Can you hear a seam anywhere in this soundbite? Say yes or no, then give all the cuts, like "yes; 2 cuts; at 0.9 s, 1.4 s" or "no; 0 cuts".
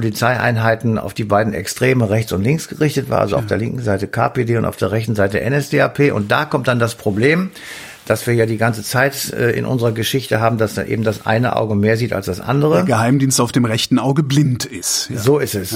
no; 0 cuts